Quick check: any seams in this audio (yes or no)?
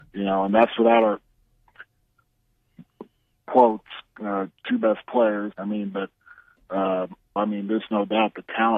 yes